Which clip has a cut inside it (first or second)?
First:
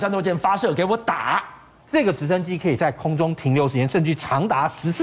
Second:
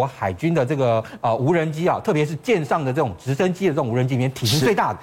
first